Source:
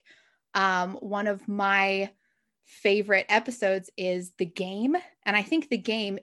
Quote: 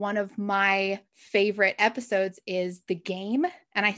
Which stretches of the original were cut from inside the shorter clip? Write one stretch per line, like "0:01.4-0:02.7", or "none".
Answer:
0:02.2-0:02.6